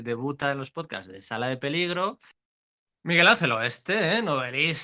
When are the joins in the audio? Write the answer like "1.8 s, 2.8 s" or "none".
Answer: none